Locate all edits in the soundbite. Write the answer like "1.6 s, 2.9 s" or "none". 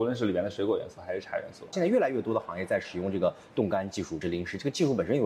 1.7 s, 4.2 s